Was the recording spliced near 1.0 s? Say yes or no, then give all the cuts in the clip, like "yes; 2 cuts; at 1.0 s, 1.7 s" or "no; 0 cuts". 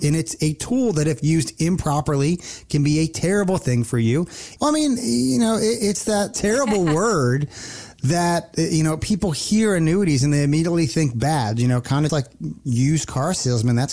no; 2 cuts; at 4.6 s, 12.1 s